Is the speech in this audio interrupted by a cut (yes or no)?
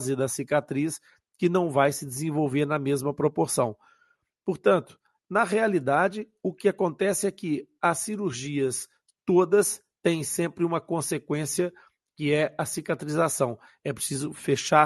no